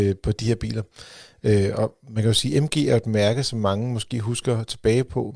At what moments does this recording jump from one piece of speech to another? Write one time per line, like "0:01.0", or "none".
none